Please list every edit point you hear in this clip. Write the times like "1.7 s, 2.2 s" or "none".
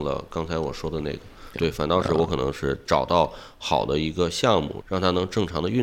1.5 s, 4.8 s